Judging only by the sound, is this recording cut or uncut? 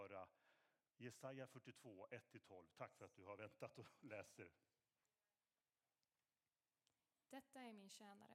uncut